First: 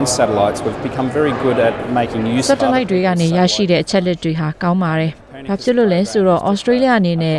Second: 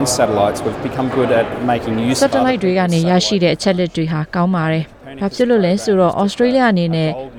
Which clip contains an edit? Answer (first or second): second